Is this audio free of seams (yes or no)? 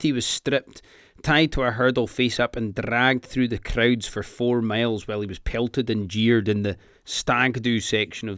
yes